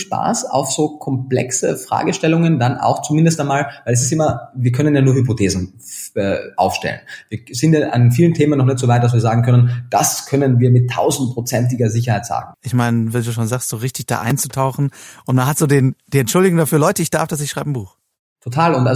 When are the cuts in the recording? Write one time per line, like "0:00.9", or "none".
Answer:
0:12.5